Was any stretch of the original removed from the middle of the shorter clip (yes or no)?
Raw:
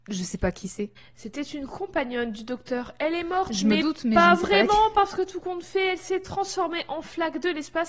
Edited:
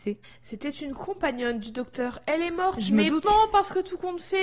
yes